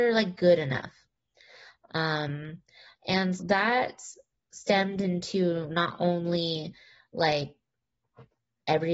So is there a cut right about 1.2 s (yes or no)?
no